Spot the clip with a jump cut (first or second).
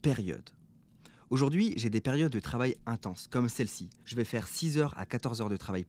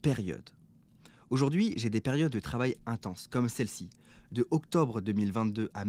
first